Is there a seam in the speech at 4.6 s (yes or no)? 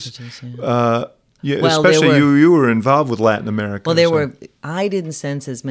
yes